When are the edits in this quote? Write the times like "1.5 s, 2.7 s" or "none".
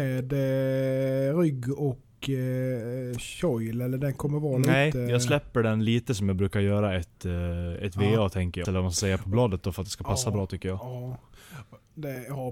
8.6 s